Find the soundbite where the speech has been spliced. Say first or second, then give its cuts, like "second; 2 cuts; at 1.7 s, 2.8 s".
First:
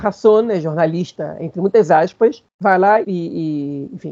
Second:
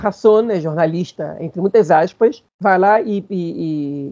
first; 1 cut; at 3.0 s